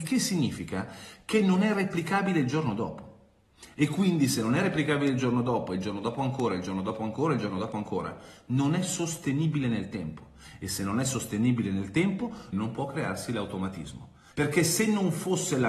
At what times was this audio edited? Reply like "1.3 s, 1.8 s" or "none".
12.5 s, 14.3 s